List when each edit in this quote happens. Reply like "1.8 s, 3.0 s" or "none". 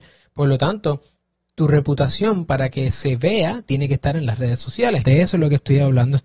5.0 s